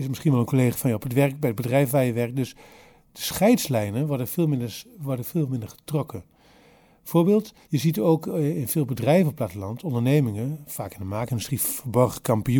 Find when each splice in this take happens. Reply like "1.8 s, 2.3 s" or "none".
7.6 s